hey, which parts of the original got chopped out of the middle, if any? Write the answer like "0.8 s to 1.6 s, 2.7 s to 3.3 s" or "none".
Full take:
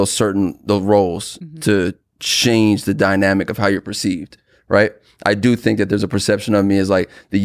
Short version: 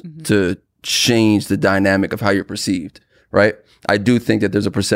none